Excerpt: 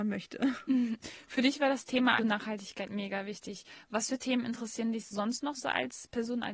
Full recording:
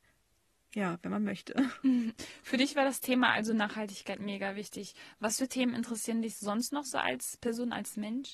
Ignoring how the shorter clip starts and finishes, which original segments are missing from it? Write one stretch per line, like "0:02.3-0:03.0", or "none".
0:03.3-0:03.5